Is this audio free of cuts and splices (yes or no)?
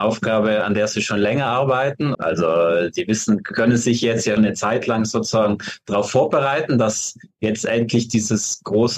no